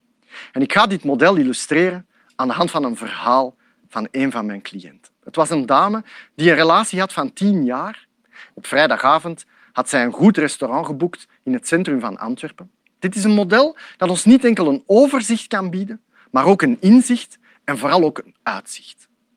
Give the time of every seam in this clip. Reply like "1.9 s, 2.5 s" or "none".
8.5 s, 13.0 s